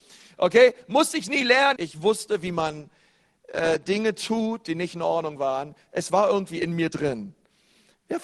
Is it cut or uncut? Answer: cut